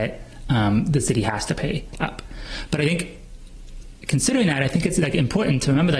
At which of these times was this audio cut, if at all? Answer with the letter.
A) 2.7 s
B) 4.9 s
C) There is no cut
C